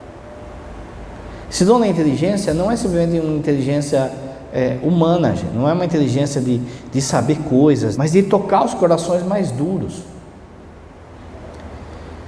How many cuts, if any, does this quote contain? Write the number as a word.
one